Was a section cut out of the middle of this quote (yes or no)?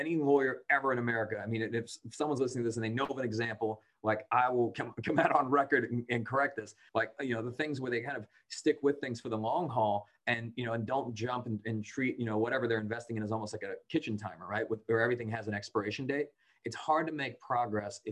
yes